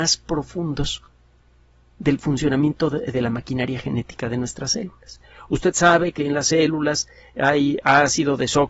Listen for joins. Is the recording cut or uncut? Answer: uncut